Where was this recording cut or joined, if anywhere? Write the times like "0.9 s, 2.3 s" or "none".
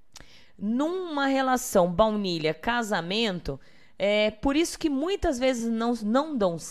none